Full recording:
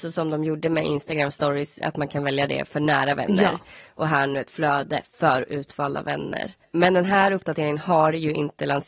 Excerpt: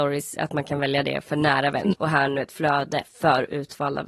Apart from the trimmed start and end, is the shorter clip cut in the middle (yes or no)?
yes